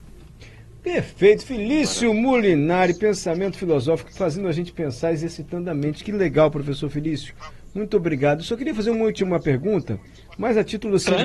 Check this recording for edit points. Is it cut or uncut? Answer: uncut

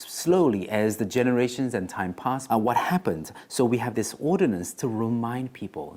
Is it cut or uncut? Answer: cut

